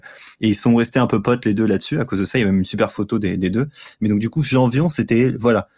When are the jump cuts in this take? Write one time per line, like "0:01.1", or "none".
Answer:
none